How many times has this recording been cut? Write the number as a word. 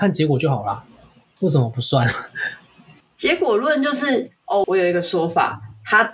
three